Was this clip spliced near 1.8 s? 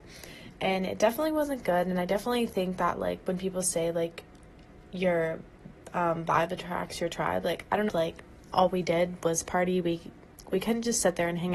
no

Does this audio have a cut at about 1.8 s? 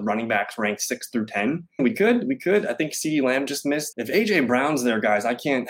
yes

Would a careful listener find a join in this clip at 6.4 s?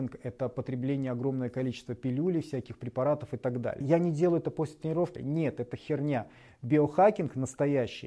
no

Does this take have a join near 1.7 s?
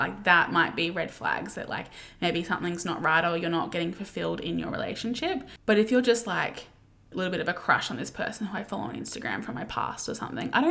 no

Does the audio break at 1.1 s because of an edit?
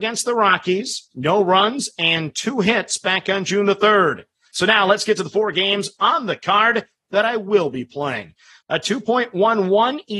yes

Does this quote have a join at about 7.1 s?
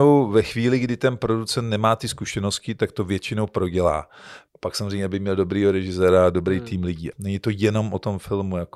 yes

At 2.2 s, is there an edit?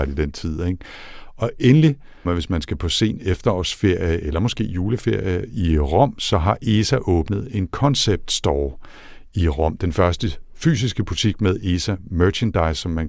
yes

